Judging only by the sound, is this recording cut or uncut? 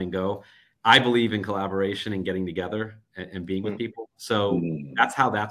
uncut